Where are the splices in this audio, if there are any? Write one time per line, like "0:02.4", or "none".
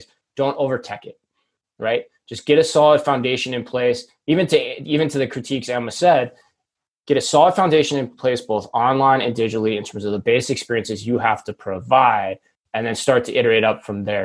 none